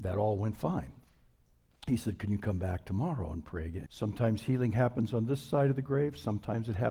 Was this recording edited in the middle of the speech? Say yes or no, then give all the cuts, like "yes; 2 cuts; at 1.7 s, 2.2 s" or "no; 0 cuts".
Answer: yes; 1 cut; at 3.9 s